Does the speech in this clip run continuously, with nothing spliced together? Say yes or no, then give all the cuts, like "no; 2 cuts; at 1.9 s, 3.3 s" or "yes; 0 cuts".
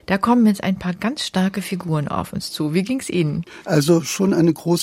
no; 1 cut; at 3.6 s